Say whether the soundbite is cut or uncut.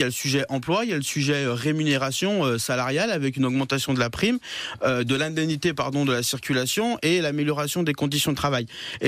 uncut